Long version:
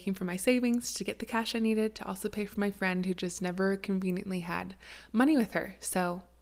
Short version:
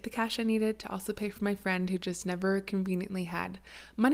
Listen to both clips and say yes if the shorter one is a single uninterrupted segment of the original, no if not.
yes